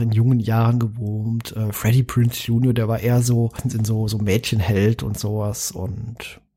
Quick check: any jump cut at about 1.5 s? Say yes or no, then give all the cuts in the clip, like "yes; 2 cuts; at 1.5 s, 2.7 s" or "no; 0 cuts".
no; 0 cuts